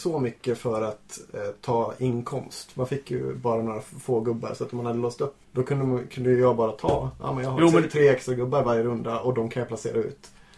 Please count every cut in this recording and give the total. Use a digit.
1